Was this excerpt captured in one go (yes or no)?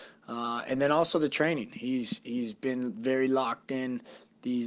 yes